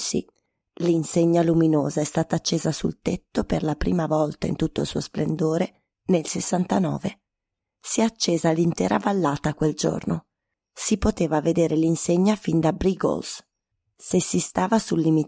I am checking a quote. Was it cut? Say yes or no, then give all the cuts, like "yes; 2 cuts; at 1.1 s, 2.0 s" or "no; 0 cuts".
no; 0 cuts